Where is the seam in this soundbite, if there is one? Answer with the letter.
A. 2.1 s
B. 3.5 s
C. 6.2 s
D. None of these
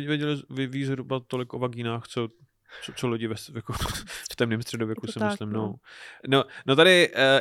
C